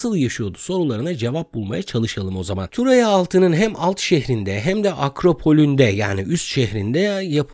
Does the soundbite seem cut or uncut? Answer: cut